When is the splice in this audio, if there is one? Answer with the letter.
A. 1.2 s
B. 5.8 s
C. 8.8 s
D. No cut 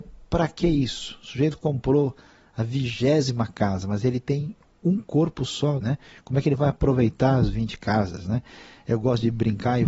B